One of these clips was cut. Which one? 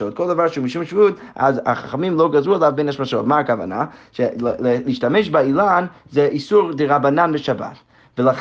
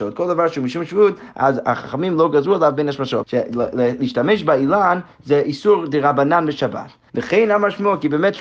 second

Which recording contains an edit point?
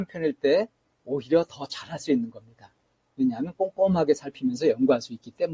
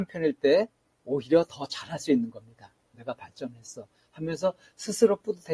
second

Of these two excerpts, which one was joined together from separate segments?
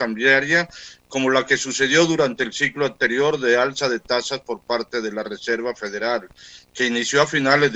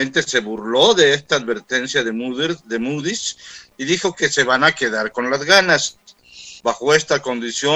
second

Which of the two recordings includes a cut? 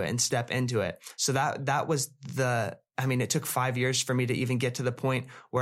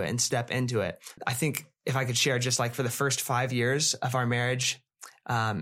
second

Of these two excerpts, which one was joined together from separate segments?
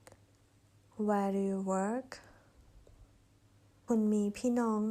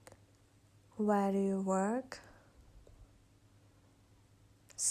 first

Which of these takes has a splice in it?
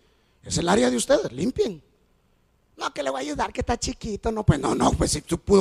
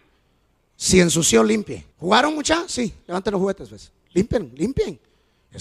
second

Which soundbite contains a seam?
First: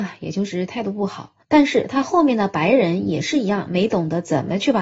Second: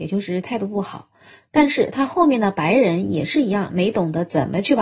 first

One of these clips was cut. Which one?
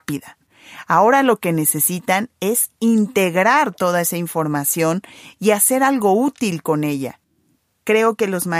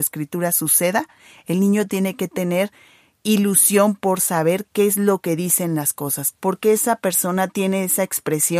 second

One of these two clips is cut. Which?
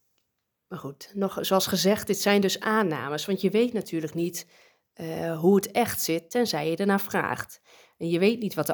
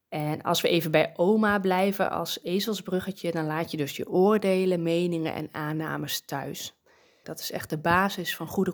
second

